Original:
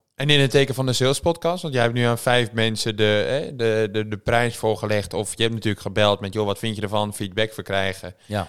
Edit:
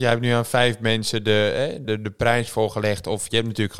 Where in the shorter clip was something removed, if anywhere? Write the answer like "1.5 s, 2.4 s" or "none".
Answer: 1.8 s